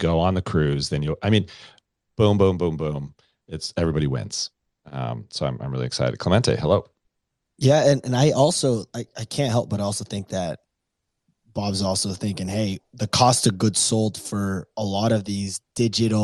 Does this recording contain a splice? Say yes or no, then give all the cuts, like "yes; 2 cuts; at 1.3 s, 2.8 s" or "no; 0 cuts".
no; 0 cuts